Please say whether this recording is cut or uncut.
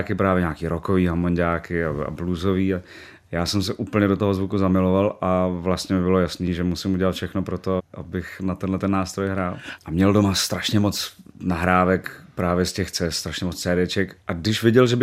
cut